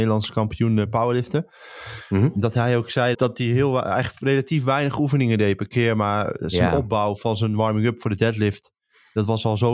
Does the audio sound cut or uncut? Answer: cut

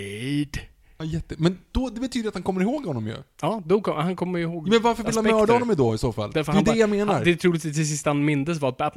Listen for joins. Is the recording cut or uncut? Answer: cut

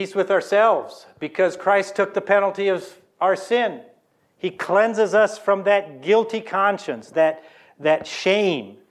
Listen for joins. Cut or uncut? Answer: cut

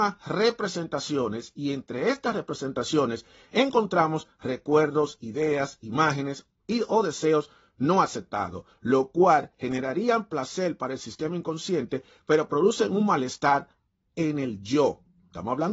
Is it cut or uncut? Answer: uncut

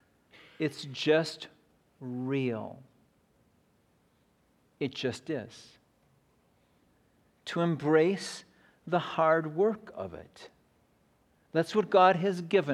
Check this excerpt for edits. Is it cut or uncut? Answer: uncut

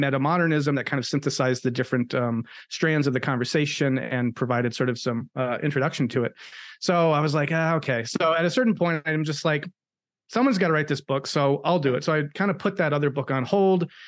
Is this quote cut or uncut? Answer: uncut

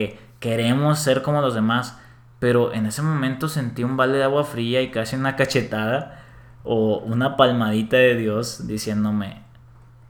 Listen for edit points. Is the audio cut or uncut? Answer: uncut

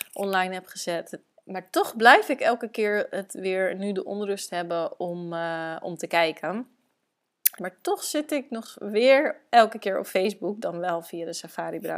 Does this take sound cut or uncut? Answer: cut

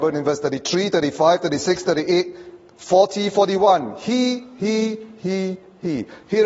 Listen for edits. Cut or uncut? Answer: uncut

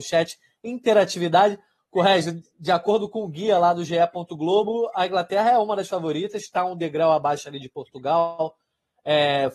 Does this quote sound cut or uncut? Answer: cut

